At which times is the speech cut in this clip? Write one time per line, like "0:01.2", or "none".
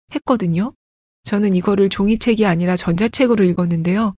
0:01.1